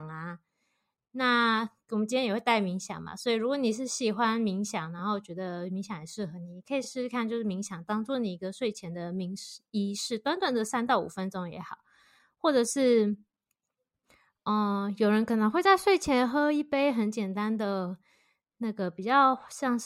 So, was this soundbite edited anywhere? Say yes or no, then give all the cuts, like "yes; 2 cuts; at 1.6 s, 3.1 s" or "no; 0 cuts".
no; 0 cuts